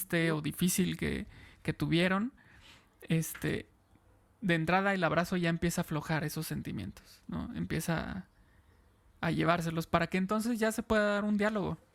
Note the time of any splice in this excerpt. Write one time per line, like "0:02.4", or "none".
none